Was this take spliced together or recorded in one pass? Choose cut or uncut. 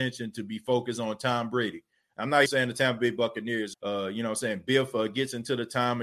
cut